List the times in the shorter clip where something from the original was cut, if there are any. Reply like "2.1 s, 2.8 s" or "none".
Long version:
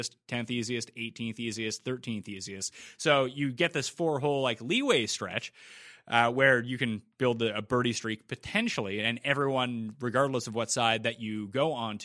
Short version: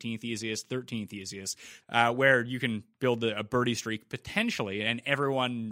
1.8 s